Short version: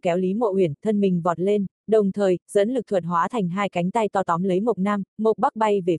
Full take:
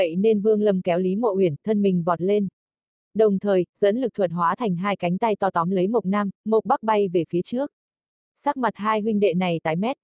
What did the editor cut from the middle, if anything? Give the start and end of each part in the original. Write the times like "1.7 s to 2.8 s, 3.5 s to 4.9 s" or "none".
2.6 s to 3.0 s